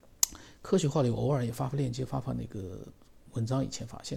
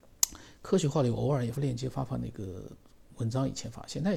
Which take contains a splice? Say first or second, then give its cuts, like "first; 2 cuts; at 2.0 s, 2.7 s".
second; 1 cut; at 1.5 s